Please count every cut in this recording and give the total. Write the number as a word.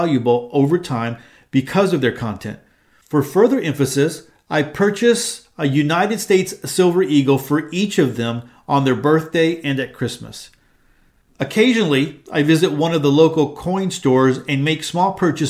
zero